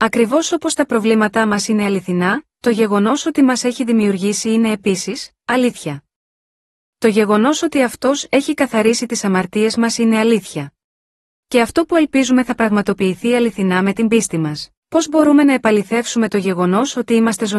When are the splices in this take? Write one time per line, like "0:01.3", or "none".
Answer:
0:11.3
0:14.8